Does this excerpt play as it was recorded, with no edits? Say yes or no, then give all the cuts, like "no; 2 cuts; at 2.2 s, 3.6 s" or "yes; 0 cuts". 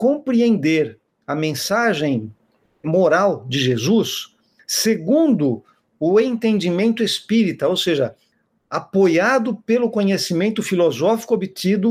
yes; 0 cuts